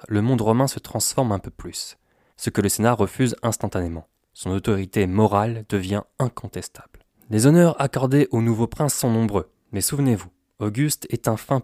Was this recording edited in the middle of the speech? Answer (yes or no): yes